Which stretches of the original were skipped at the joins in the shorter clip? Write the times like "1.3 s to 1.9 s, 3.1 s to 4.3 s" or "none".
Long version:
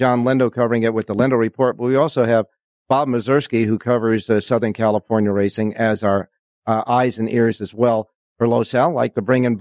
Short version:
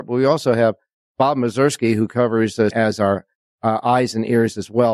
4.4 s to 5.7 s